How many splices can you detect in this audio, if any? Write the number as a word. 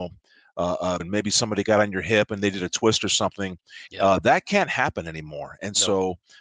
two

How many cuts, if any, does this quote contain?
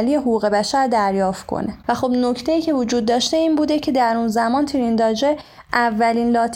one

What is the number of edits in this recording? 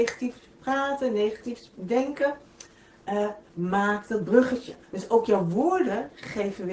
two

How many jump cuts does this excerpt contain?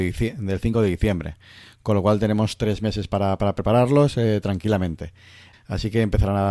one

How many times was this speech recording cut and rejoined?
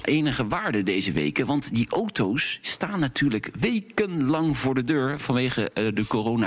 zero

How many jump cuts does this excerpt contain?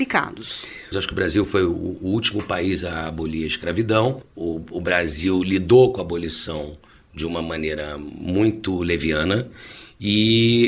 one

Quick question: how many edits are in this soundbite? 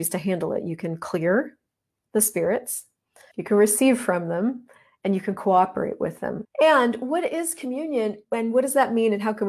three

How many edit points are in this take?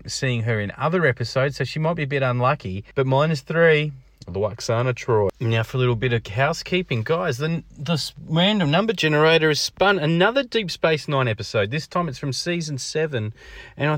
one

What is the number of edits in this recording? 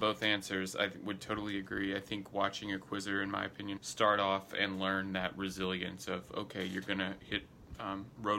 one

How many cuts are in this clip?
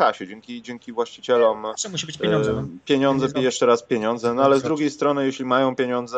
zero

